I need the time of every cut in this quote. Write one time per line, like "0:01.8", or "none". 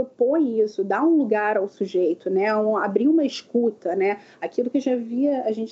none